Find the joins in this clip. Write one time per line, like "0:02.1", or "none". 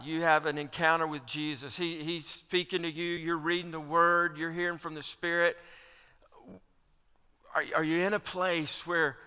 none